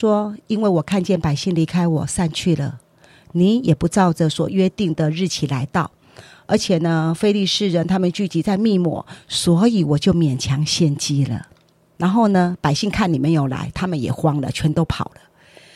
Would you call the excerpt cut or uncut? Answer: cut